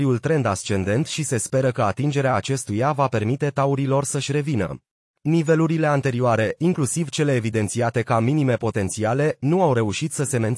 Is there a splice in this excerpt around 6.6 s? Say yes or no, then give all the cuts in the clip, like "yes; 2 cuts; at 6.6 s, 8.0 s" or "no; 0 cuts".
no; 1 cut; at 5.1 s